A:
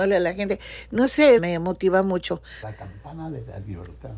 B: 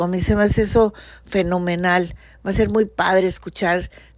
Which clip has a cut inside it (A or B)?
A